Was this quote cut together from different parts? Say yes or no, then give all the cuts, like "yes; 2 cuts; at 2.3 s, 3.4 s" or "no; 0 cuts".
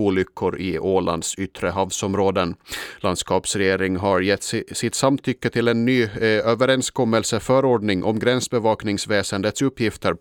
no; 0 cuts